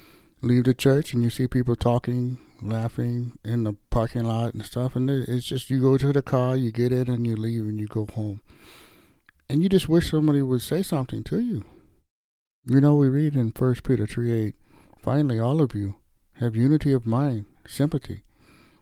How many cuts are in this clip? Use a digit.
0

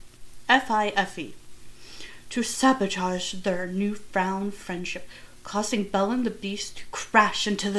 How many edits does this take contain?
0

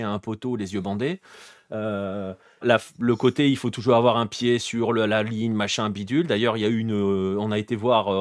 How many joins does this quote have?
1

